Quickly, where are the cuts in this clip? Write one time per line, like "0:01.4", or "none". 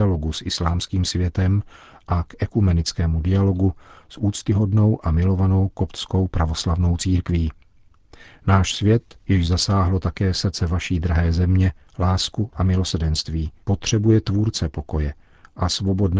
0:09.2
0:11.9
0:13.6